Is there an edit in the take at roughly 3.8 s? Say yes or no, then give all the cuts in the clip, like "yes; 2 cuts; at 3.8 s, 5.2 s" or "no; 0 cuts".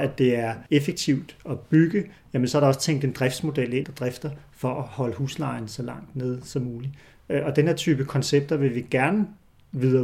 yes; 1 cut; at 3.8 s